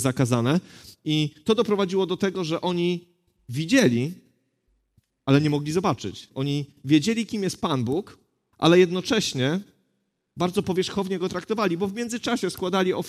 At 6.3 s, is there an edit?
yes; 1 cut; at 6.3 s

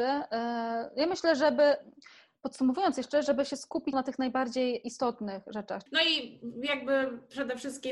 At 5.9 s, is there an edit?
yes; 2 cuts; at 3.9 s, 5.9 s

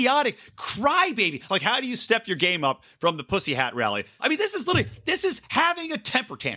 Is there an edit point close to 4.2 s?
yes; 2 cuts; at 1.5 s, 4.2 s

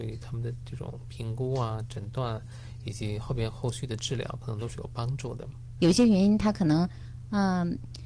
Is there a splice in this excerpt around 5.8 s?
yes; 1 cut; at 5.8 s

